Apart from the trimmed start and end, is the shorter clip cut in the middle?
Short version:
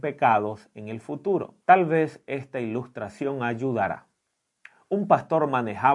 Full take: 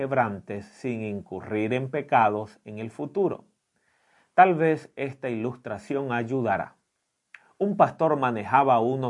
yes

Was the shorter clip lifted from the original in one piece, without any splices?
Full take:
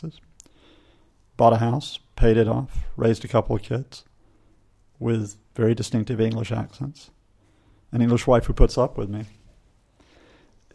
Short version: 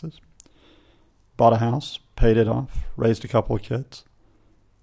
yes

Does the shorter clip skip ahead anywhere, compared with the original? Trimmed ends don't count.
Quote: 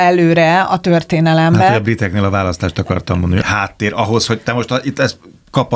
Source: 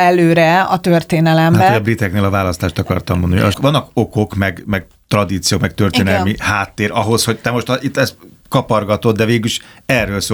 yes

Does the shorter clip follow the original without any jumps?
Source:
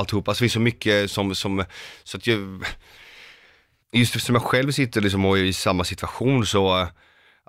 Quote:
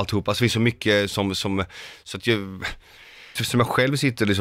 no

